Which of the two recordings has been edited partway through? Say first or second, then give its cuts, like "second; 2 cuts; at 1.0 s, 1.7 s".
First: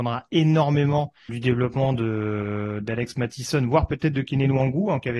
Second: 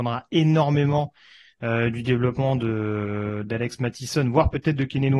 first; 1 cut; at 1.3 s